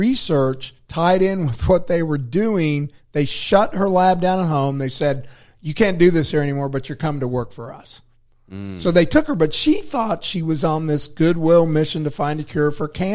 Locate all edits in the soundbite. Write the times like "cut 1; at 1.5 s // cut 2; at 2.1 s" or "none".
none